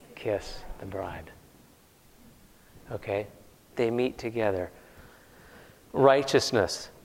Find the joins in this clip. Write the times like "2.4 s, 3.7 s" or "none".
3.7 s